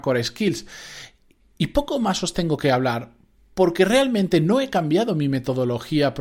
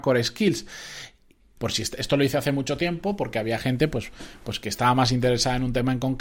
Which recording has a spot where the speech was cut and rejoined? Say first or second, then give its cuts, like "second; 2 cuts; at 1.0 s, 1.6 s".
second; 1 cut; at 1.6 s